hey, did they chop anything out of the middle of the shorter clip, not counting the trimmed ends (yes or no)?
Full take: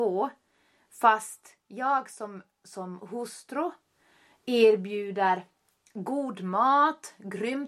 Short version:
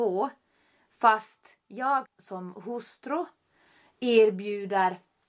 yes